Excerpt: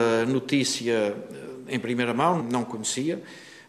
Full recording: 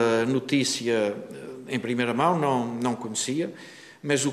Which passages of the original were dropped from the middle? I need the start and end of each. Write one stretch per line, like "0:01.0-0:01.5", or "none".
0:02.4-0:02.7